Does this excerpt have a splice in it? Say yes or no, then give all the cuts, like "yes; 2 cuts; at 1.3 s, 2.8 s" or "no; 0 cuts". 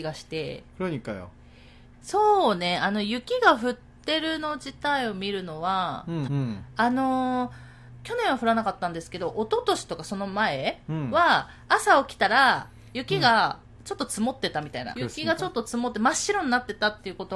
yes; 3 cuts; at 1.9 s, 6.3 s, 14.9 s